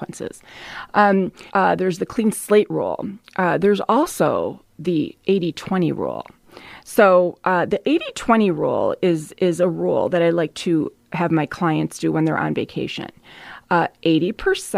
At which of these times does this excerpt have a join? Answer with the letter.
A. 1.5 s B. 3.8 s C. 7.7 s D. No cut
A